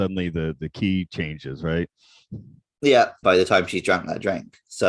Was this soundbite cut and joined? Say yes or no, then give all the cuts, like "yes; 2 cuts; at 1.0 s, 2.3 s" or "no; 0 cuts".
yes; 1 cut; at 3.2 s